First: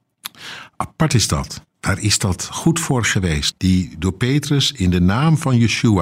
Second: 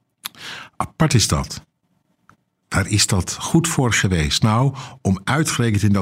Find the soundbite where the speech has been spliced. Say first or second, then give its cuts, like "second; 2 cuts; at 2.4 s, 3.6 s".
first; 2 cuts; at 1.7 s, 3.5 s